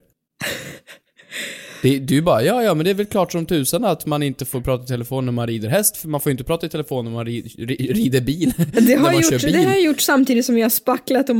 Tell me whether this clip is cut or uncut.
uncut